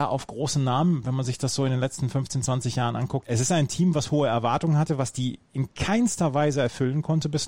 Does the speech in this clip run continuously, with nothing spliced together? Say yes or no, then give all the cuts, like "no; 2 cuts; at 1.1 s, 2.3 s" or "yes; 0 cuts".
no; 1 cut; at 3.2 s